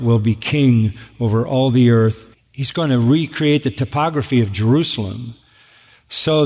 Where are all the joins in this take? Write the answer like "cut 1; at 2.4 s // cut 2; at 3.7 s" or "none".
cut 1; at 2.3 s